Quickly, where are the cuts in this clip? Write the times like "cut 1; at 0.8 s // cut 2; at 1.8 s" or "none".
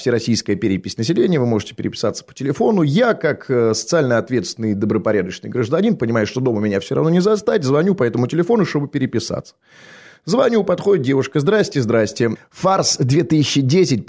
cut 1; at 12.4 s